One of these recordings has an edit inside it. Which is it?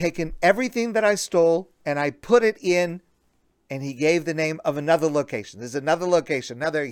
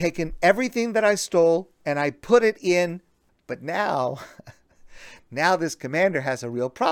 second; 1 cut; at 3.3 s

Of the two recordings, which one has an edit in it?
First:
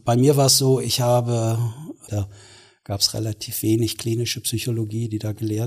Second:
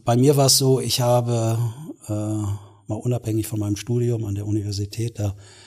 first; 1 cut; at 2.1 s

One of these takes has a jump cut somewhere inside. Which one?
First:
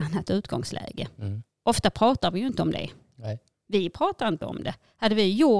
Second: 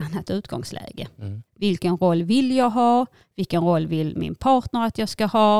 second; 1 cut; at 1.5 s

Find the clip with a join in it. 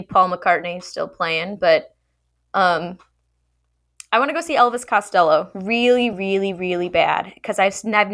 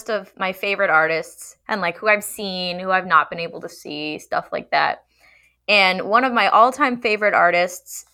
first; 1 cut; at 6.1 s

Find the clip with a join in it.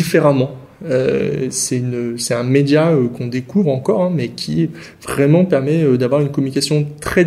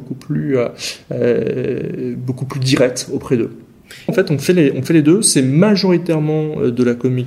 second; 1 cut; at 4.1 s

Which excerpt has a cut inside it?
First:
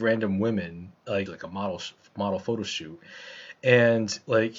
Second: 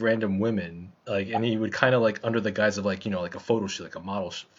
first; 1 cut; at 1.3 s

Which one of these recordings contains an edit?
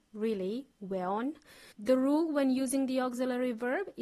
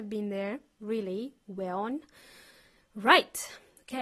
first; 1 cut; at 1.7 s

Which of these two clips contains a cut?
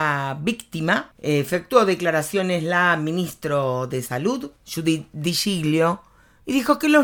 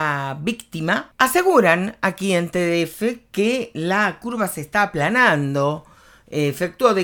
first; 1 cut; at 1.1 s

